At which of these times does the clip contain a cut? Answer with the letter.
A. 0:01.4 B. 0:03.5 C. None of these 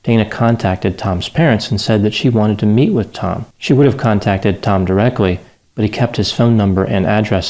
B